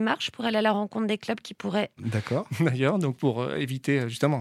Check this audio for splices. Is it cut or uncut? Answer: cut